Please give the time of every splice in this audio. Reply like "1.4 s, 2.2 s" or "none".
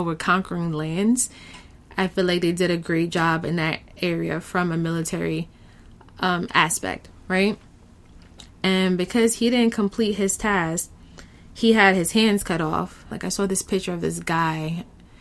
8.5 s, 13.1 s